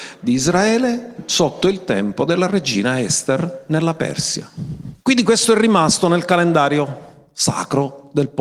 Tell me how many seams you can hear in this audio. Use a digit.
1